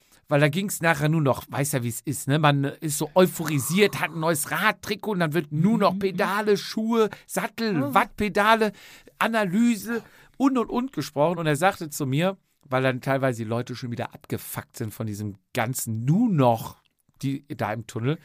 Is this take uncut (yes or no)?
yes